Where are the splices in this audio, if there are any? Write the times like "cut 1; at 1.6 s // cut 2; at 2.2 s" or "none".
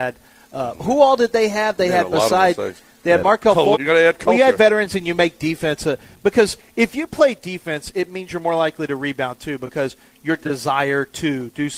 cut 1; at 3.7 s